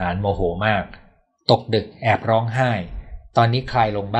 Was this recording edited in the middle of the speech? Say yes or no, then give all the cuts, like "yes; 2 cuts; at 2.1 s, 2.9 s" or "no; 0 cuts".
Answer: no; 0 cuts